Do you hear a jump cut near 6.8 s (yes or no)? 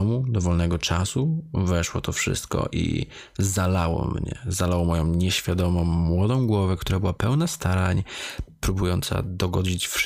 no